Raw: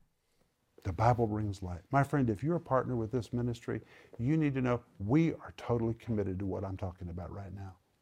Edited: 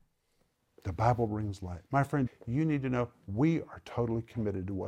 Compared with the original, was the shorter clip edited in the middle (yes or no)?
yes